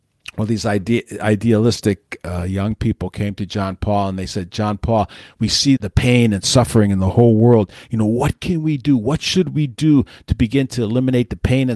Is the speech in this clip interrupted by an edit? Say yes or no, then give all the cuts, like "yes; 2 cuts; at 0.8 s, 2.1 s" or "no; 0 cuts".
yes; 1 cut; at 5.8 s